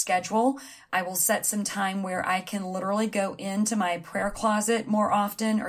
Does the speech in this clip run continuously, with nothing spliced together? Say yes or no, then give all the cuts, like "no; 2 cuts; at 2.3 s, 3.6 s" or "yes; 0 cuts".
yes; 0 cuts